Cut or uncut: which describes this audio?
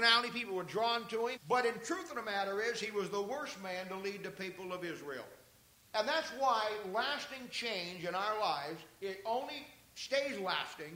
cut